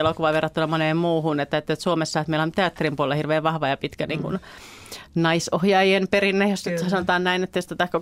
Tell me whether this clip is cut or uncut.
uncut